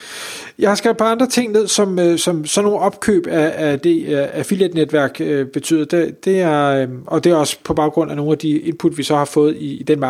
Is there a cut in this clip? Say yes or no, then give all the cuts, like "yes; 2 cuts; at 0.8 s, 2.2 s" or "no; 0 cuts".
no; 0 cuts